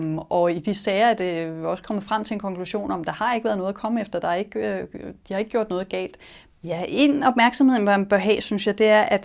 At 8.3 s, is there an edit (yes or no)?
no